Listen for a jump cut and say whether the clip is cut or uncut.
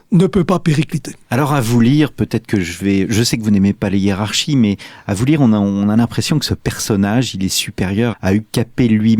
cut